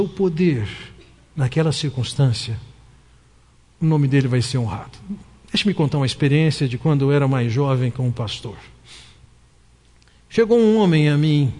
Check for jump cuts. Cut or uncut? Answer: uncut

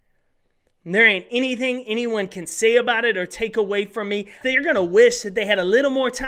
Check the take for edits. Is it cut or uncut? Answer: cut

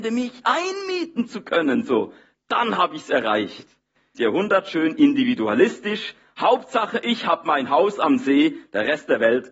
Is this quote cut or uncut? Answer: cut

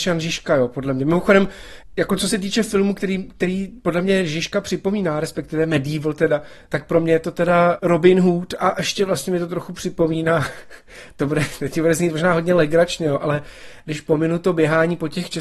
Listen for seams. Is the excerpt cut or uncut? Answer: uncut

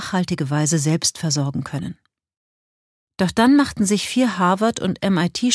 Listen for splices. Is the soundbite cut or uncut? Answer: cut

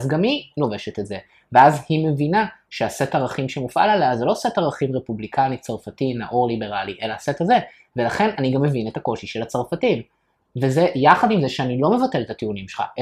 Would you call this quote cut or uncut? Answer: uncut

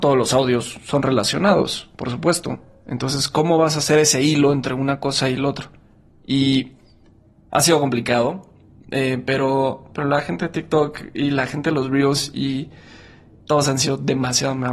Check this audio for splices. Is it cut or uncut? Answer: uncut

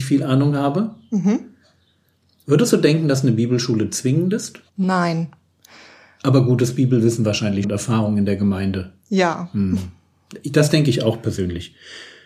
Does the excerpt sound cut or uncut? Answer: cut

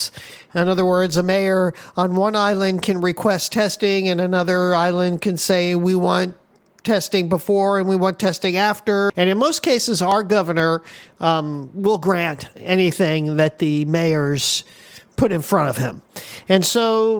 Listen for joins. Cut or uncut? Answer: cut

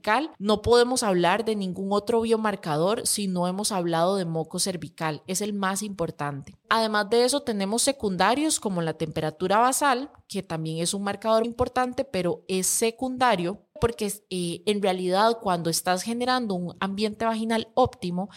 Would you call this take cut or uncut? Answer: cut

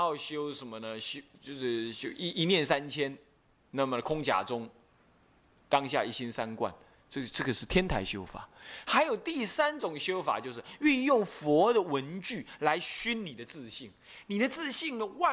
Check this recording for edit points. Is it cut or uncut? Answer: uncut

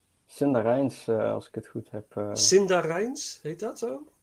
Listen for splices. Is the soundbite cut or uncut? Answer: uncut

